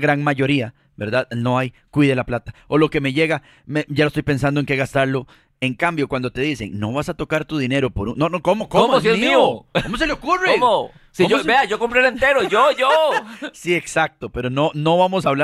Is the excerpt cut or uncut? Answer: uncut